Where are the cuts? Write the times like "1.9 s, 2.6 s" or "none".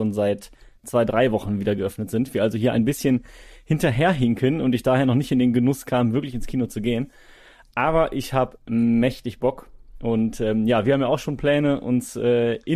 none